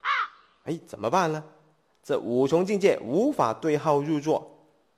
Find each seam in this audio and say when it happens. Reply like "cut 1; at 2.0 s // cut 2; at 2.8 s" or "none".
none